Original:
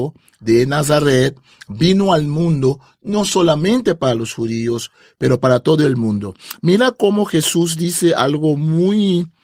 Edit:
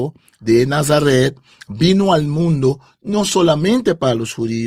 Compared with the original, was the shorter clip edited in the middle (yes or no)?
no